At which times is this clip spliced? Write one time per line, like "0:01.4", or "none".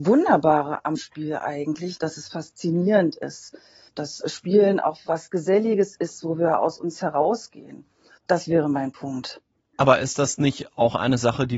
0:02.0
0:06.2
0:08.2

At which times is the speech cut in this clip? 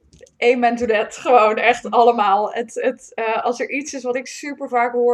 none

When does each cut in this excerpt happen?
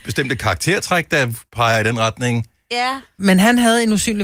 0:03.2

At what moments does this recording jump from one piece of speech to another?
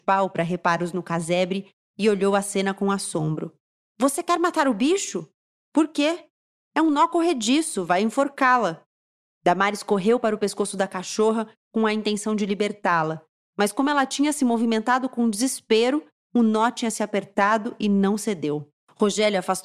none

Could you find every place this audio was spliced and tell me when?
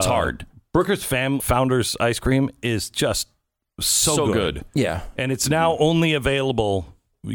0:01.4

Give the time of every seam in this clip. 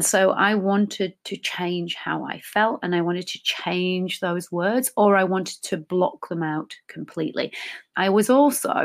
0:07.9

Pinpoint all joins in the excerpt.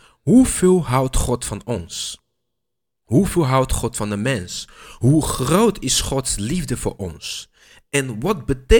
none

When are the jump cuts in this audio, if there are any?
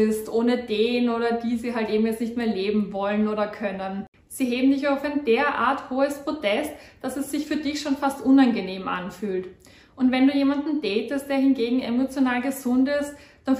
none

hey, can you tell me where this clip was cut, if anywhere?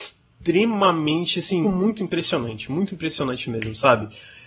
0:01.6

